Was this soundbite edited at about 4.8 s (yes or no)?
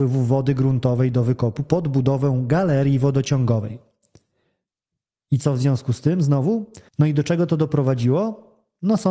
no